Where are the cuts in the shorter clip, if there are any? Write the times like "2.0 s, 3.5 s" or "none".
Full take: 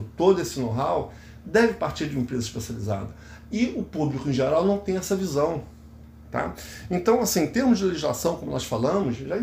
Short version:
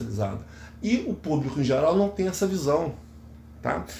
none